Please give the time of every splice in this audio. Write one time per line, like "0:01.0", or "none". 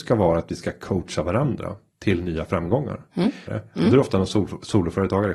0:03.5